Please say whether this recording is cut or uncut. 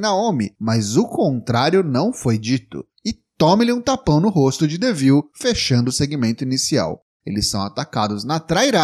cut